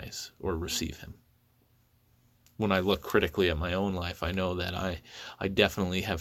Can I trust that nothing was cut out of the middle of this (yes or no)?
yes